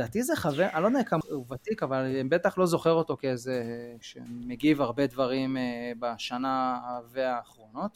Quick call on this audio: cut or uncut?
cut